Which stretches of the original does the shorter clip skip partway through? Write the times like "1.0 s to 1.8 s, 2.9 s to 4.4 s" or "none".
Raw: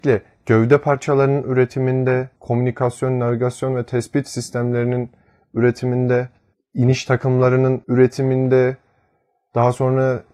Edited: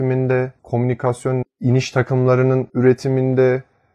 3.2 s to 6.6 s

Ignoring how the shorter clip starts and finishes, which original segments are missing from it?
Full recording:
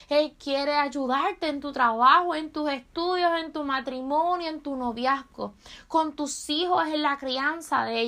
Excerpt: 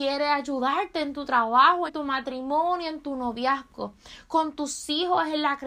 2.3 s to 3.5 s

